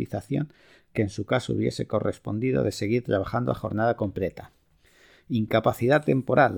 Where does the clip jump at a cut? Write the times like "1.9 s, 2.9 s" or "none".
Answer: none